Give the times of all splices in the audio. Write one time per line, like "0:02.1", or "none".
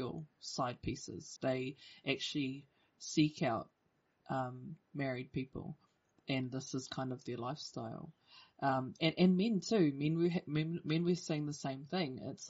0:01.4